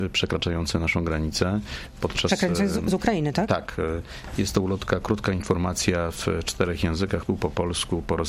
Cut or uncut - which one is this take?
cut